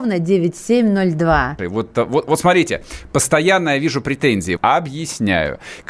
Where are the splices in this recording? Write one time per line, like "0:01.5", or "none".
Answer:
0:01.6
0:04.6